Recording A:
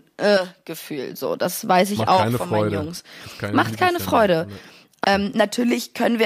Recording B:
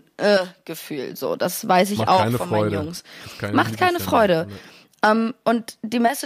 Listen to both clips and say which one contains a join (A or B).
A